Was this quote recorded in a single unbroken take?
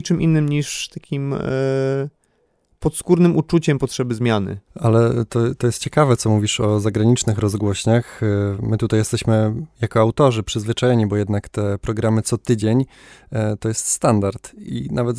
yes; 0 cuts

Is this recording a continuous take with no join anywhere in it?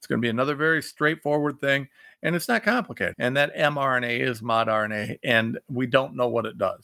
no; 1 cut; at 3.1 s

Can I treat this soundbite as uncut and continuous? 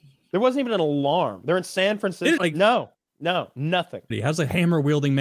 no; 2 cuts; at 2.4 s, 4.1 s

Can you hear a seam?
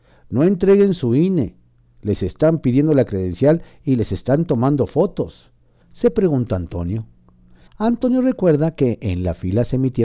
yes; 2 cuts; at 5.8 s, 7.7 s

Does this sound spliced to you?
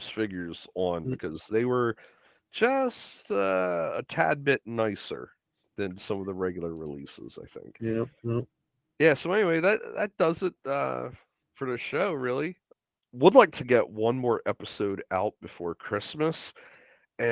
no; 0 cuts

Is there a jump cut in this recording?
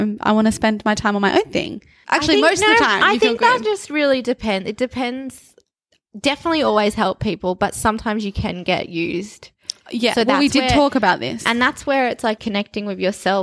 yes; 2 cuts; at 2.0 s, 12.4 s

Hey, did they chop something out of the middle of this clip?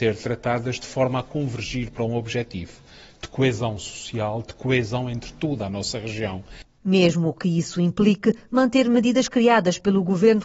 no; 0 cuts

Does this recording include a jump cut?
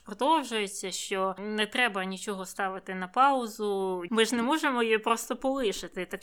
yes; 1 cut; at 4.1 s

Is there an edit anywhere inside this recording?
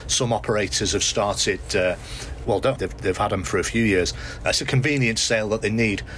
yes; 2 cuts; at 2.8 s, 4.4 s

